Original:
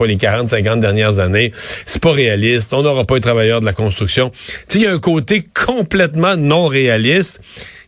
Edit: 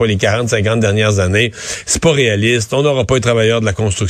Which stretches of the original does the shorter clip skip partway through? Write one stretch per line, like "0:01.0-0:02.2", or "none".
none